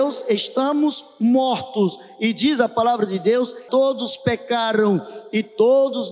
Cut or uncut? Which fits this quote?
cut